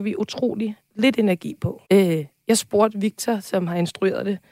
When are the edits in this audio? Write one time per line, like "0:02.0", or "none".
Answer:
0:01.9